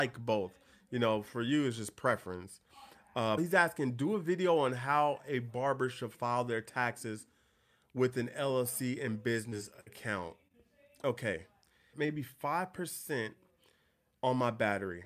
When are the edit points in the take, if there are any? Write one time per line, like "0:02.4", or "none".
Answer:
0:03.4
0:11.9